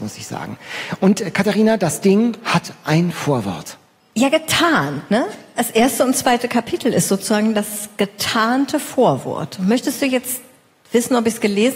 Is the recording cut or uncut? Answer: uncut